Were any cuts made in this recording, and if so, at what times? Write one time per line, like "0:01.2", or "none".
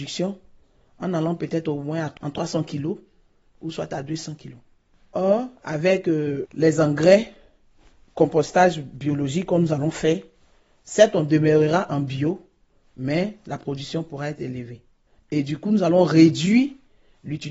none